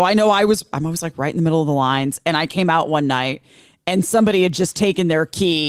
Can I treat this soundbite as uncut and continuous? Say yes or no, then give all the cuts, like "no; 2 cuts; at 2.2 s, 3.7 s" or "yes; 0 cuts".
yes; 0 cuts